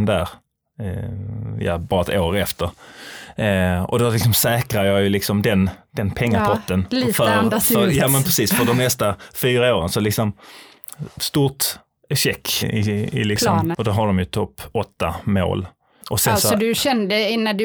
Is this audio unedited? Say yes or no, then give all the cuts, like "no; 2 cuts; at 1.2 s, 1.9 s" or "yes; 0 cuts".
no; 3 cuts; at 12.6 s, 13.7 s, 16.0 s